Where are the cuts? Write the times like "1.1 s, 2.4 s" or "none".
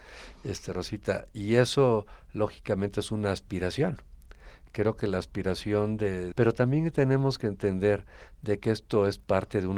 6.3 s